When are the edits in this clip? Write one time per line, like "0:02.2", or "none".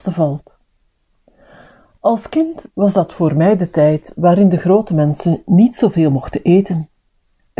none